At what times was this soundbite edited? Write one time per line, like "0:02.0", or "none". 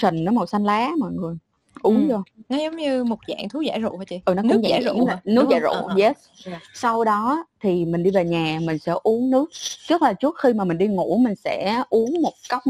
0:04.2